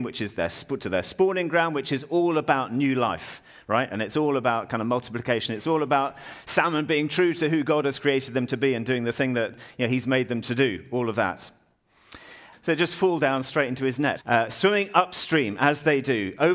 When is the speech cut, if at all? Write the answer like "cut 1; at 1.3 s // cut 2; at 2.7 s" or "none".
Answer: cut 1; at 12.5 s // cut 2; at 14.2 s